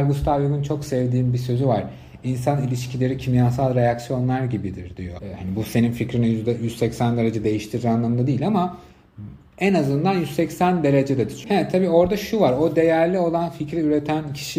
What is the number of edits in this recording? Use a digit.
2